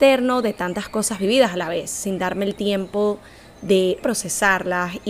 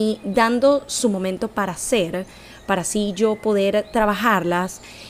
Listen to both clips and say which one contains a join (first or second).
first